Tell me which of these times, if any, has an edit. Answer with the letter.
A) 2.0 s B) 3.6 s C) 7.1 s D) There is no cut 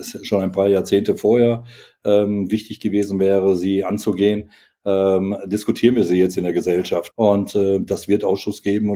C